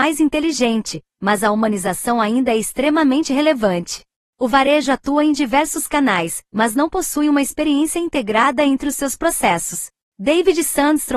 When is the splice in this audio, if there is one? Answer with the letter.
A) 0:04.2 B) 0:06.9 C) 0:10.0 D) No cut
A